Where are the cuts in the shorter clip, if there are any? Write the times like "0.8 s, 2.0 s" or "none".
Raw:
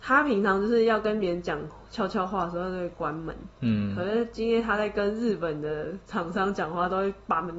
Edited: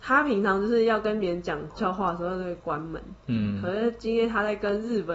1.8 s